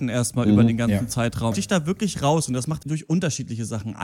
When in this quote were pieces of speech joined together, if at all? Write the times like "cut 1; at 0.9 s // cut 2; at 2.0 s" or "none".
cut 1; at 1.5 s // cut 2; at 2.8 s